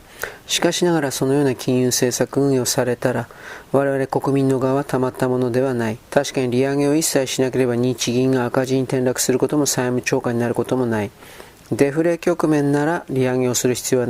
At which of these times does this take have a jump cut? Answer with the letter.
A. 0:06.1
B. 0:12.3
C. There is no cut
A